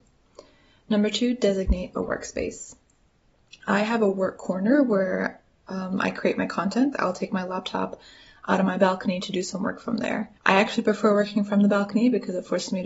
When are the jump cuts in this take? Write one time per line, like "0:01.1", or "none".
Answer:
0:06.9
0:10.4